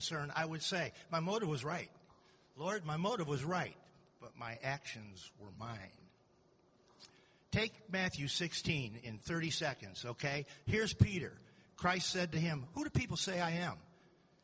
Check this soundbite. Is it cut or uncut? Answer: uncut